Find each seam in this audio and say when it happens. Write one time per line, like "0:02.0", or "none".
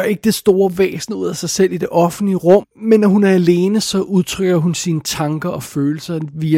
0:02.6